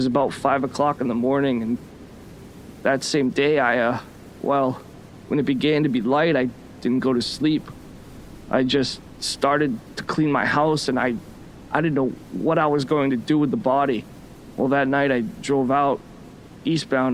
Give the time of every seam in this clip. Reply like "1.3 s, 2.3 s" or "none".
none